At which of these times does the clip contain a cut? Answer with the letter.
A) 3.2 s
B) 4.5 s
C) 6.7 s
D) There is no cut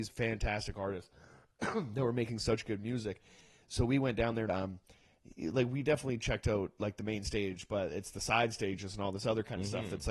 B